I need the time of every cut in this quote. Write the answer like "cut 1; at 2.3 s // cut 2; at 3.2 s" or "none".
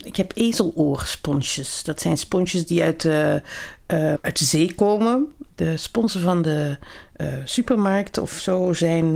cut 1; at 4.1 s // cut 2; at 5.4 s